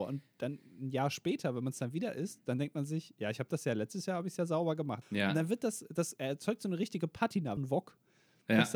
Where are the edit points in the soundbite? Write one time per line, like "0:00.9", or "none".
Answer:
0:05.0
0:07.6